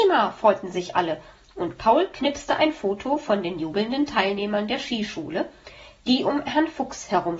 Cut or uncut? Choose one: uncut